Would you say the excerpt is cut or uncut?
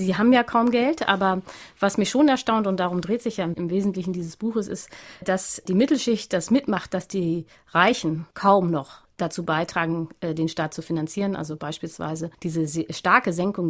cut